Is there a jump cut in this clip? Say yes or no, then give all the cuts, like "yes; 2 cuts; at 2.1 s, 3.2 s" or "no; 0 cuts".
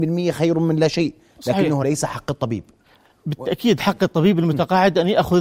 no; 0 cuts